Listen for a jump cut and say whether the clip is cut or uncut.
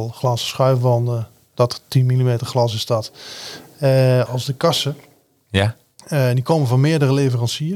cut